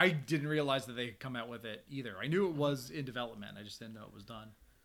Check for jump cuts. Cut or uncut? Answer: uncut